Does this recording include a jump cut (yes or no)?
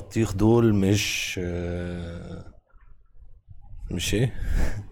yes